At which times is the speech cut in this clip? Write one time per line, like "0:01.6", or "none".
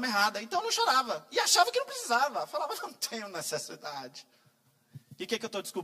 none